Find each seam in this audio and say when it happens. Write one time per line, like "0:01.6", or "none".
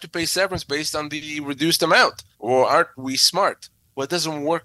0:02.3